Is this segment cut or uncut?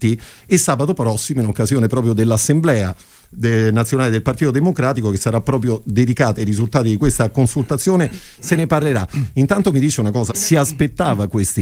cut